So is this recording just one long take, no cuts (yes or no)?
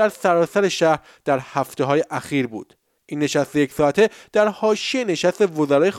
no